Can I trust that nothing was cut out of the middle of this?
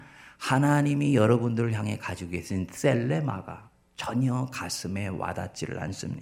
yes; 0 cuts

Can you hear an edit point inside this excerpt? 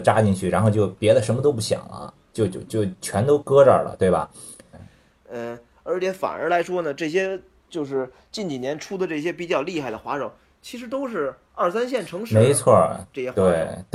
yes; 1 cut; at 4.7 s

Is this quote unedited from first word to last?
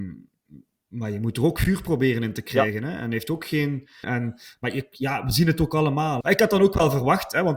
no; 2 cuts; at 4.0 s, 6.2 s

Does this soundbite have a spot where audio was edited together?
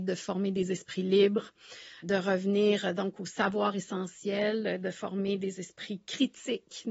yes; 1 cut; at 2.0 s

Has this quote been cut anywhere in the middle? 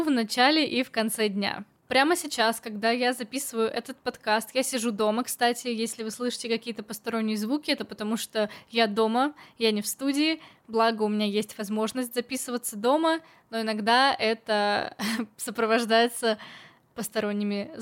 no; 0 cuts

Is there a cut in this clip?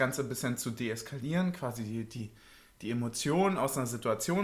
no; 0 cuts

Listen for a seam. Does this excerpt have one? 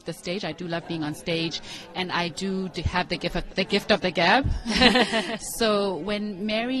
yes; 1 cut; at 3.5 s

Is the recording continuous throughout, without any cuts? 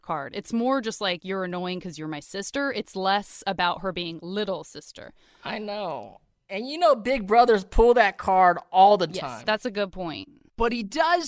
yes; 0 cuts

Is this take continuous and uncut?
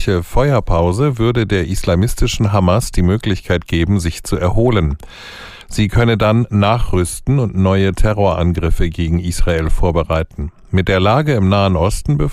yes; 0 cuts

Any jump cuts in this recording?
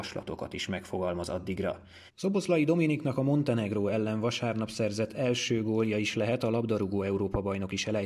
yes; 1 cut; at 2.1 s

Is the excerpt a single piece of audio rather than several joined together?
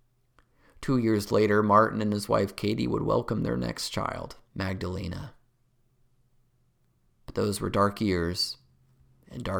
no; 1 cut; at 4.5 s

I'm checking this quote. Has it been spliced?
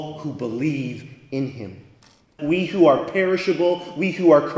yes; 1 cut; at 2.4 s

